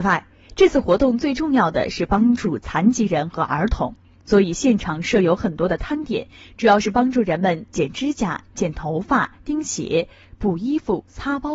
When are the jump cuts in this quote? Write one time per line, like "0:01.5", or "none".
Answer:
none